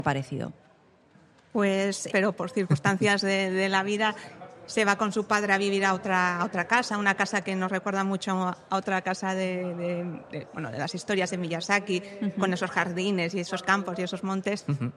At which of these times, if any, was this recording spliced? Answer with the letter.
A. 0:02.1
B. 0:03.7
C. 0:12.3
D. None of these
A